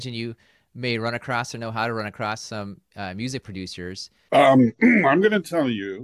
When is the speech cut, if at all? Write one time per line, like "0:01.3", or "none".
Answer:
0:04.3